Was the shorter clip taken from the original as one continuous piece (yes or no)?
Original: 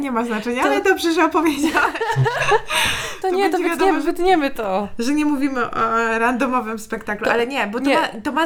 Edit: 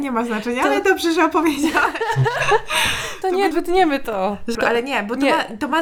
no